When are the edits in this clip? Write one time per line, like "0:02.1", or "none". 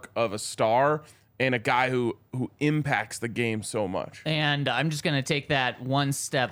none